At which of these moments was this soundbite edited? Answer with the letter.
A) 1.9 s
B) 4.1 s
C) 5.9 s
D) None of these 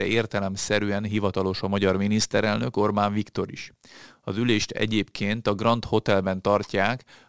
D